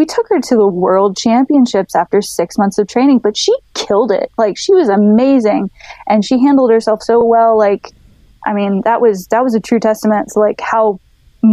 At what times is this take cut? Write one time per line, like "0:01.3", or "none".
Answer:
none

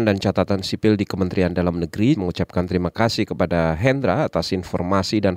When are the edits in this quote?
0:02.1

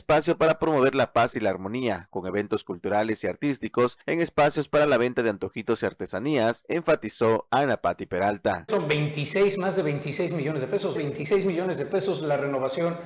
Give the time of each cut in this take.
0:08.7
0:10.9

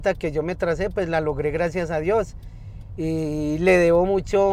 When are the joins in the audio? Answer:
none

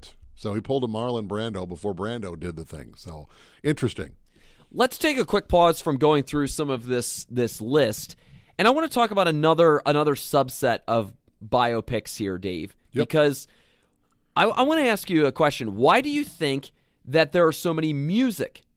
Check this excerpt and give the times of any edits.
none

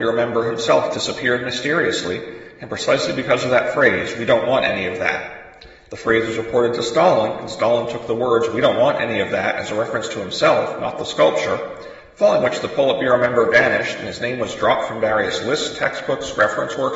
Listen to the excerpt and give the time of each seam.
none

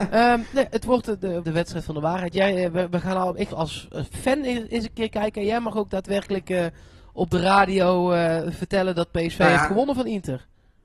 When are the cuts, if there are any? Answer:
0:01.4
0:03.5

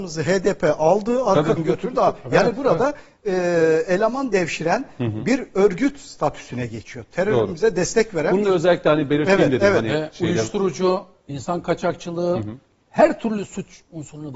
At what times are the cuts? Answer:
0:01.6

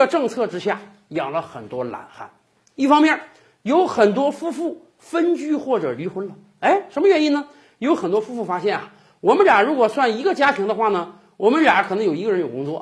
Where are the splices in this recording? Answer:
none

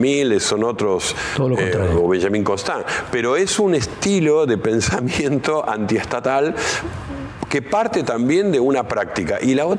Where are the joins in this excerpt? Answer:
none

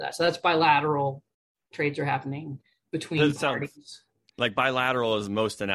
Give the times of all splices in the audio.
none

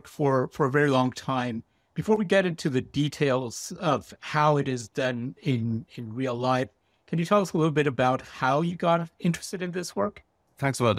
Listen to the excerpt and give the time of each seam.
none

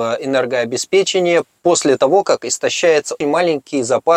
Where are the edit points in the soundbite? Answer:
0:03.2

